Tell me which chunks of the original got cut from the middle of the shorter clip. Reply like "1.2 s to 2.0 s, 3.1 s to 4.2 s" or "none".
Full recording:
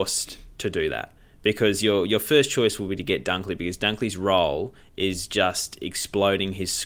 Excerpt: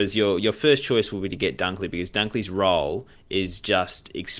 none